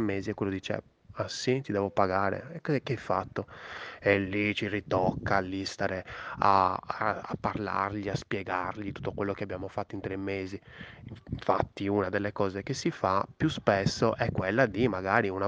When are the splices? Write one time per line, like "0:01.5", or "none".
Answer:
none